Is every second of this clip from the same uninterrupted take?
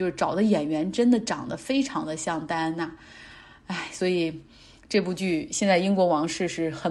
yes; 0 cuts

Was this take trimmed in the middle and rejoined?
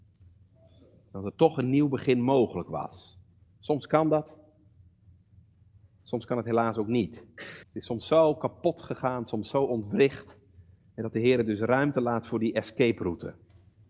yes; 1 cut; at 7.6 s

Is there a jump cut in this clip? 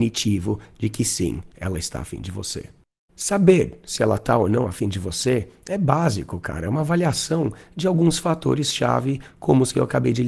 no; 0 cuts

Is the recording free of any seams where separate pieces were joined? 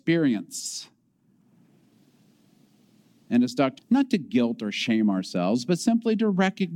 no; 1 cut; at 3.8 s

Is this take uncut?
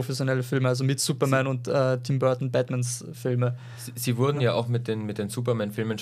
yes; 0 cuts

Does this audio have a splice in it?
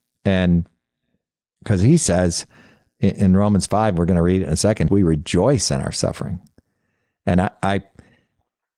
yes; 1 cut; at 4.9 s

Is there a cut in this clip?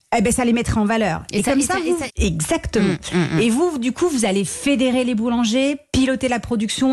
yes; 1 cut; at 2.1 s

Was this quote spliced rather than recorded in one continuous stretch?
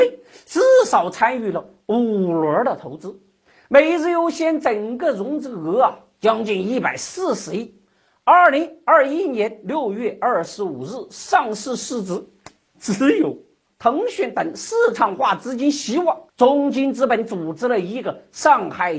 yes; 2 cuts; at 13.7 s, 16.3 s

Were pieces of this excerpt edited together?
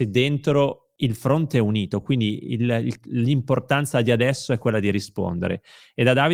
no; 0 cuts

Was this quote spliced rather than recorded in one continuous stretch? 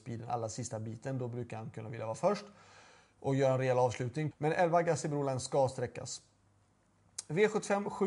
yes; 1 cut; at 4.3 s

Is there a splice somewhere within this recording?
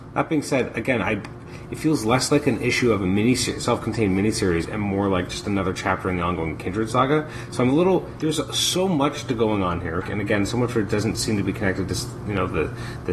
yes; 2 cuts; at 8.2 s, 10.0 s

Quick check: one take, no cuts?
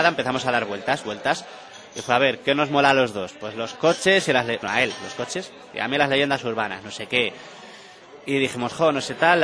no; 1 cut; at 4.6 s

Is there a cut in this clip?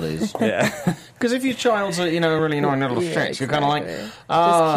no; 0 cuts

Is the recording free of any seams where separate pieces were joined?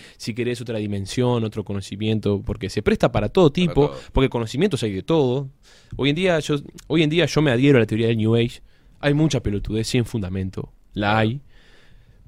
yes; 0 cuts

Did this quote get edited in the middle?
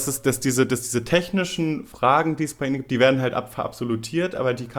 no; 0 cuts

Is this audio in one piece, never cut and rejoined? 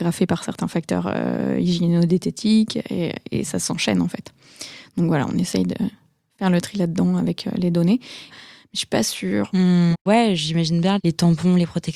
no; 3 cuts; at 8.3 s, 9.9 s, 11.0 s

